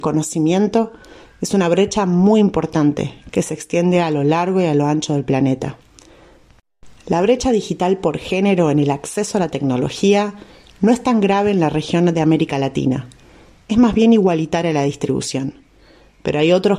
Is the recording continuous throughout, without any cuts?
yes; 0 cuts

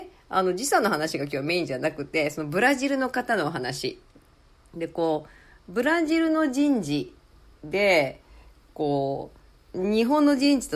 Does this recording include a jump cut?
no; 0 cuts

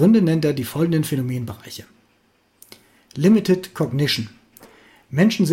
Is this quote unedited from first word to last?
yes; 0 cuts

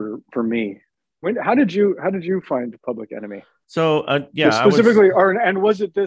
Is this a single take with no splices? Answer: yes; 0 cuts

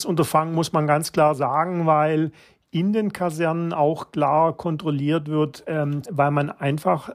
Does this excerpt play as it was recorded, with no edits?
no; 1 cut; at 6.0 s

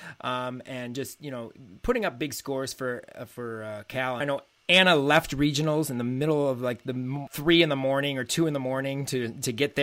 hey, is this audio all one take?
no; 2 cuts; at 4.2 s, 7.3 s

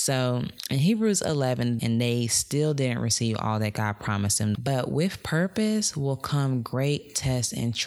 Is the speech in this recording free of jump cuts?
no; 2 cuts; at 1.8 s, 4.5 s

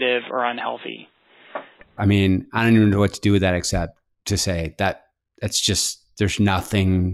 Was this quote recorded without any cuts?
no; 1 cut; at 2.0 s

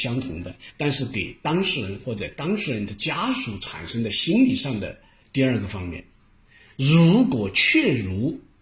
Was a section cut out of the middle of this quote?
yes; 1 cut; at 5.2 s

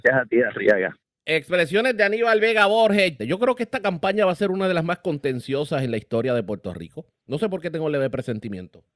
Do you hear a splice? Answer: yes; 1 cut; at 3.2 s

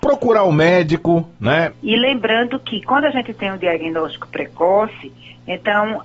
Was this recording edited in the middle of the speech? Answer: yes; 1 cut; at 1.7 s

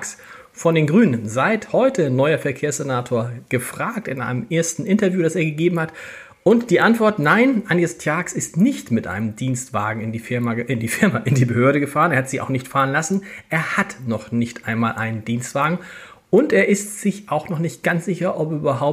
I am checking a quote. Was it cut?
no; 0 cuts

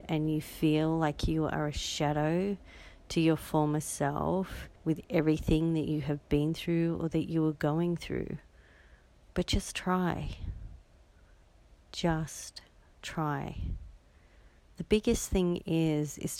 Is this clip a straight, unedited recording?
no; 1 cut; at 4.8 s

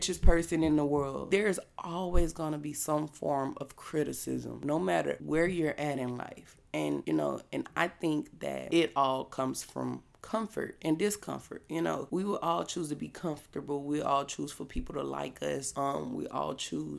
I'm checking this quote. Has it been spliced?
no; 0 cuts

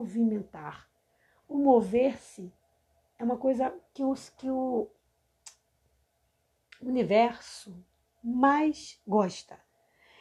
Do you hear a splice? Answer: no; 0 cuts

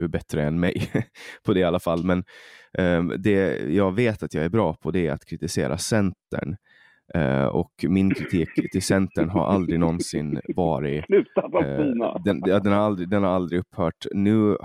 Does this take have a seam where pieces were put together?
no; 0 cuts

